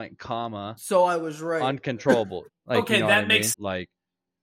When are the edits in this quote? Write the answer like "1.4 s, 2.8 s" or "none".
2.5 s, 3.5 s